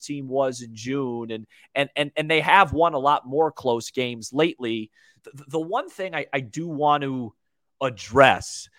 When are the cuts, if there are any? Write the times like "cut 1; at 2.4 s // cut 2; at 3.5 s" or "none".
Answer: cut 1; at 5.2 s